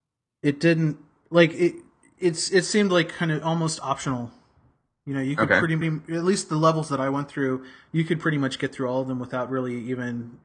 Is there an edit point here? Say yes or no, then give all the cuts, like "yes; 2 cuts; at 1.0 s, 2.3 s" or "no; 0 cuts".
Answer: yes; 1 cut; at 5.8 s